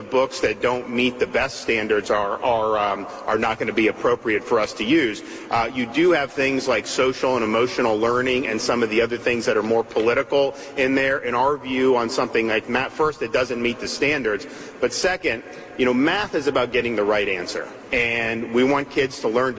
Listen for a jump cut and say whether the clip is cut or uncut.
uncut